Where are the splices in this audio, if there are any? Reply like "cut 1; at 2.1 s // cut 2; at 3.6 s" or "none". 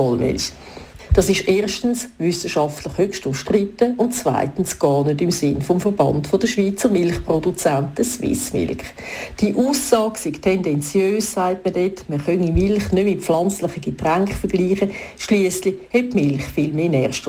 none